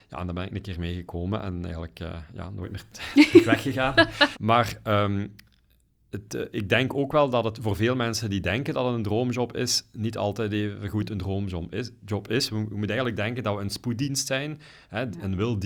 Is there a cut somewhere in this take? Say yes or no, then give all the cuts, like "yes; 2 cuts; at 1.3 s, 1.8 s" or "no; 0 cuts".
yes; 1 cut; at 4.3 s